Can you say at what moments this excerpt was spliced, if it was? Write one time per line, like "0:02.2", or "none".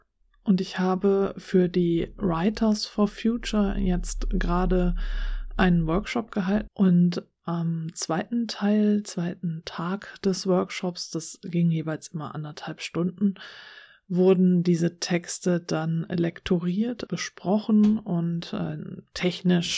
0:06.7
0:17.1